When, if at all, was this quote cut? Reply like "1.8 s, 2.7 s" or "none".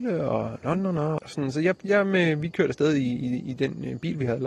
1.2 s